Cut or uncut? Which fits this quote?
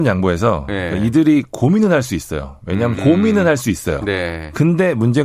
cut